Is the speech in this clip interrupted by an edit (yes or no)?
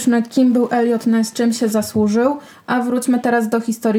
no